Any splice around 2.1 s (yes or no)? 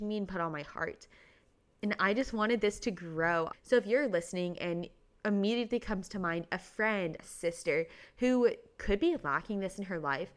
no